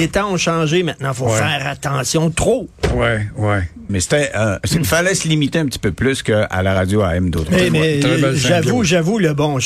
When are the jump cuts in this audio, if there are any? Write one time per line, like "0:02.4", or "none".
0:03.9